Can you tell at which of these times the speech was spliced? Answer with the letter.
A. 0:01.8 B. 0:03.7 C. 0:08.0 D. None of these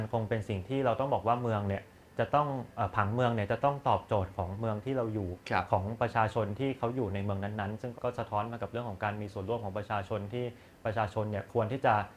C